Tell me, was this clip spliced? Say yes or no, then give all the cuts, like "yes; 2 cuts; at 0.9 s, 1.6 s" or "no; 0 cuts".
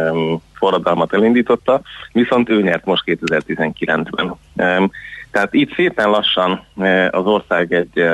no; 0 cuts